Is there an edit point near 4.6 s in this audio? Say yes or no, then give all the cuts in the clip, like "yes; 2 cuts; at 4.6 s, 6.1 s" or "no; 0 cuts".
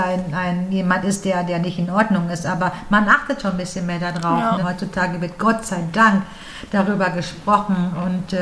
yes; 1 cut; at 4.6 s